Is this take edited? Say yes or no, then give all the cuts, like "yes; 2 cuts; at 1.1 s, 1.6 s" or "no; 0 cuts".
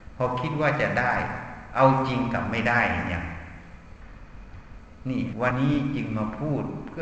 yes; 1 cut; at 5.5 s